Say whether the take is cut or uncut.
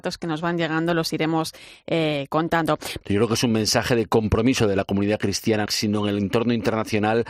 cut